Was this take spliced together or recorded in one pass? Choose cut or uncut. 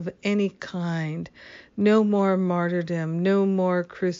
uncut